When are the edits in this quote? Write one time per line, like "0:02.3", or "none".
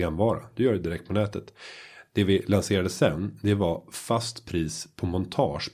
none